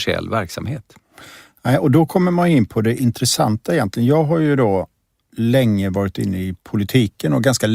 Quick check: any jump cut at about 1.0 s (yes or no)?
no